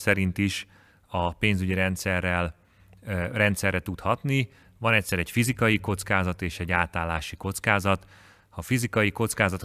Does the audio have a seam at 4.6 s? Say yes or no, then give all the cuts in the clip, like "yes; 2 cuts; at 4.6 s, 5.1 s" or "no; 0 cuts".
no; 0 cuts